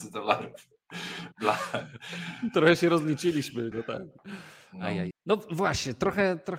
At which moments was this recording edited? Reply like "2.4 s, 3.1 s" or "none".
1.3 s, 3.7 s, 5.1 s